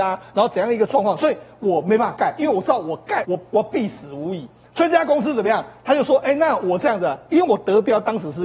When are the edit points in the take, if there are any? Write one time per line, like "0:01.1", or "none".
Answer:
0:03.2